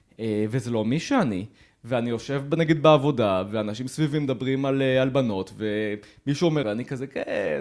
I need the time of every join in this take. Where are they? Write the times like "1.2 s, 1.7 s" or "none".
6.6 s